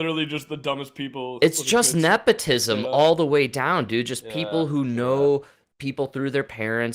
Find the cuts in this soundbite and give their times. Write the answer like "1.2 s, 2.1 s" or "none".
none